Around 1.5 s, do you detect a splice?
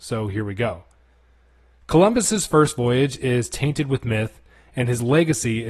no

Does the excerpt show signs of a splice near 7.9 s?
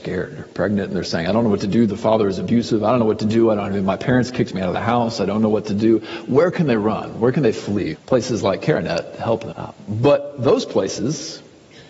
yes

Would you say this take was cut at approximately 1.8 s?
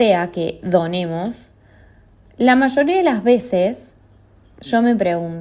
no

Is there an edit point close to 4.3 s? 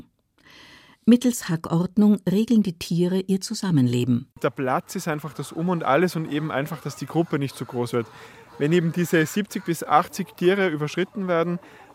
yes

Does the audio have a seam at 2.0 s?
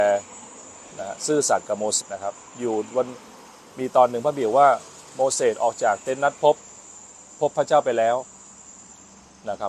yes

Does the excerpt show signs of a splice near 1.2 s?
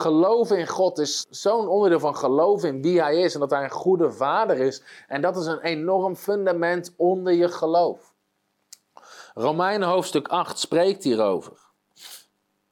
yes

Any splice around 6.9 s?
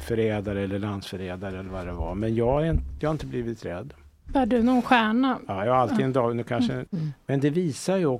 yes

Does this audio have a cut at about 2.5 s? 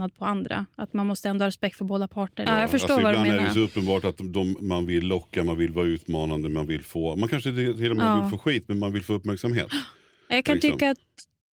yes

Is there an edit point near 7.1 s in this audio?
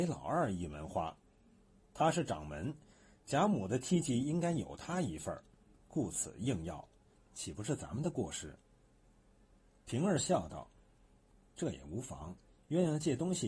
yes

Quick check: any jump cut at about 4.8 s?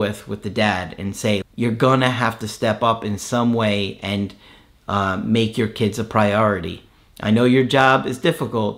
no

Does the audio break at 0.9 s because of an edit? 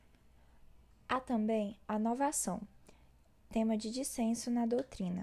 yes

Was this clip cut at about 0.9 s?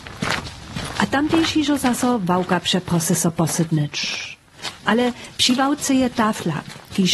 no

